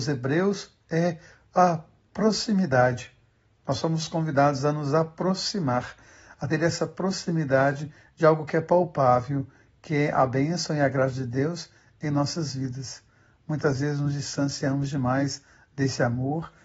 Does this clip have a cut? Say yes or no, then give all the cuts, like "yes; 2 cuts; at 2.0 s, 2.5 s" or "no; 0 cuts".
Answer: no; 0 cuts